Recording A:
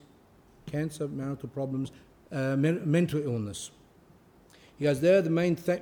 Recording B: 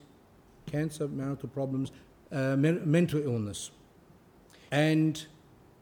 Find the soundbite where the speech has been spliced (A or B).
B